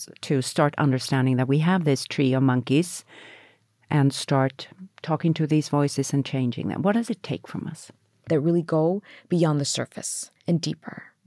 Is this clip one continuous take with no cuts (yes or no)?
no